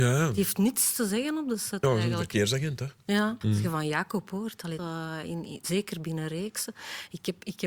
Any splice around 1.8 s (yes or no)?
no